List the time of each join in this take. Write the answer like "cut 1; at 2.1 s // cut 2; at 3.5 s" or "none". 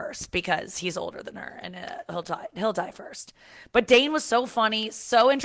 none